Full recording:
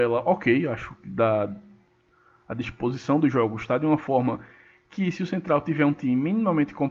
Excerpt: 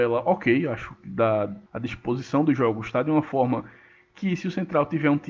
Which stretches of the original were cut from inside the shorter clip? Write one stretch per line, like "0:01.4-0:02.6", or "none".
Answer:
0:01.7-0:02.4